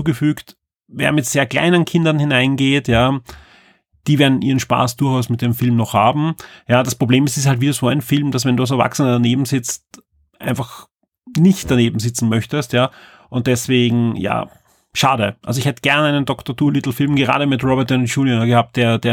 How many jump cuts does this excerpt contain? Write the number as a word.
zero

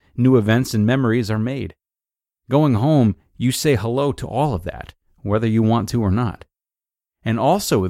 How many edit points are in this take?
zero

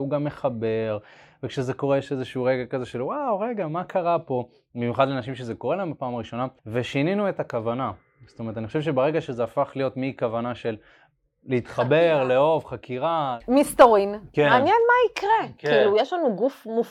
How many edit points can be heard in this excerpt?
one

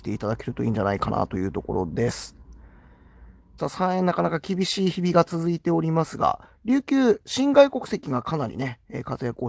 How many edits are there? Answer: one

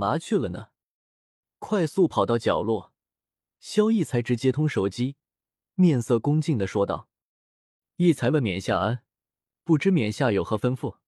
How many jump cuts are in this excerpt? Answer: one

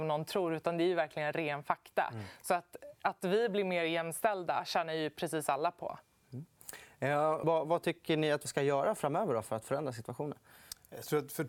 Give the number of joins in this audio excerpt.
two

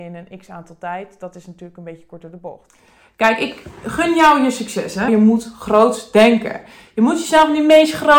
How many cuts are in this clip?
one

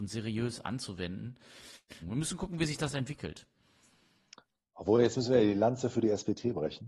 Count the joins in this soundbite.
one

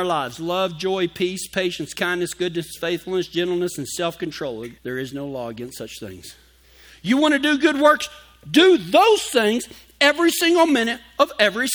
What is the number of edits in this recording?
one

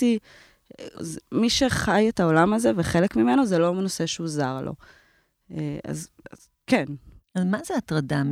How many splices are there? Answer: one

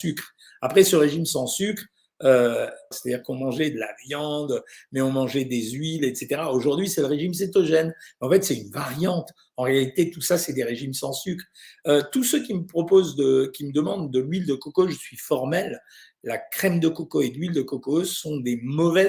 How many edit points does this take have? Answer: one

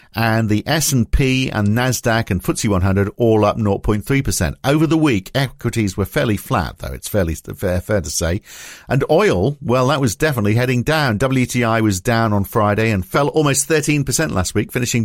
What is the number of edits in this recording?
zero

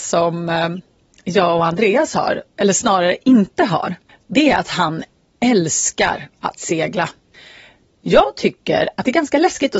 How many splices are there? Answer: one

